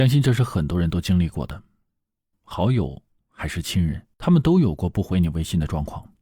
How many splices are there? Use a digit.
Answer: 2